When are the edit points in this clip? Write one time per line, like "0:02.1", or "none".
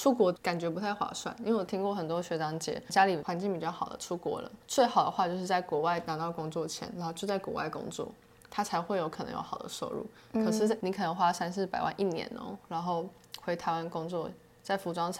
none